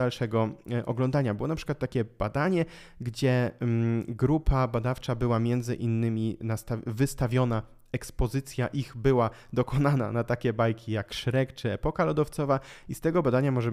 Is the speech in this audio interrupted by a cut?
no; 0 cuts

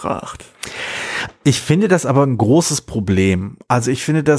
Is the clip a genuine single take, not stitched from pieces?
yes; 0 cuts

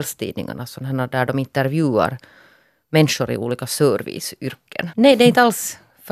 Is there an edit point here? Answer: yes; 1 cut; at 4.9 s

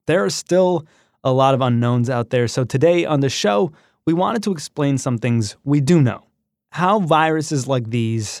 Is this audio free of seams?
yes; 0 cuts

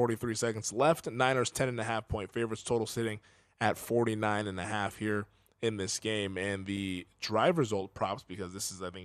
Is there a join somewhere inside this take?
no; 0 cuts

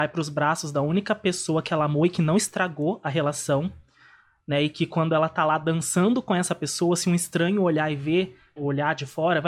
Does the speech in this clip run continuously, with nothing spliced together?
no; 1 cut; at 8.6 s

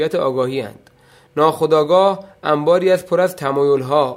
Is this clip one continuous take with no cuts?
yes; 0 cuts

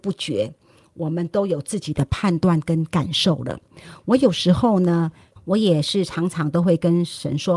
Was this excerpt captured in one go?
no; 1 cut; at 5.4 s

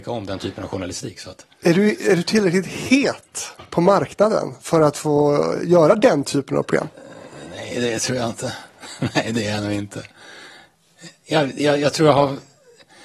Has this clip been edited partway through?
no; 0 cuts

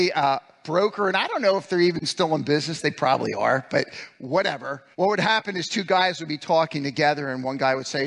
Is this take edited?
yes; 1 cut; at 4.9 s

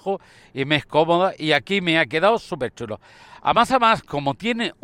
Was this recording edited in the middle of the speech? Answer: no; 0 cuts

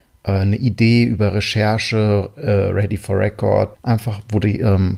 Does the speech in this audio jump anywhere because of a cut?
yes; 1 cut; at 3.7 s

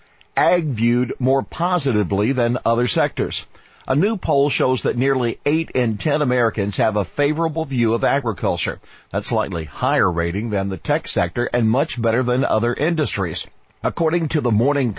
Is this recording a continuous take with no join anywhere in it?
yes; 0 cuts

